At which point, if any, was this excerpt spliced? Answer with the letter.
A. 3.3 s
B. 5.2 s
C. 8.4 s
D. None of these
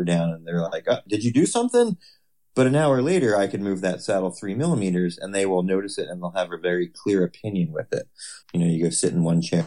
C